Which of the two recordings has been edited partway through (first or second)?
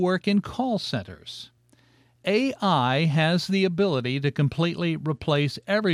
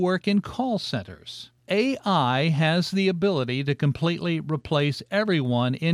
second